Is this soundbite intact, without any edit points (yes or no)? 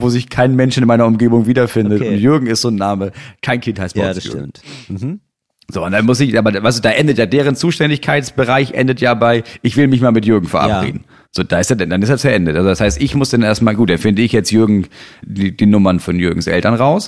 no